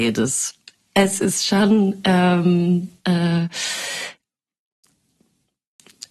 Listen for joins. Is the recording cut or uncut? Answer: cut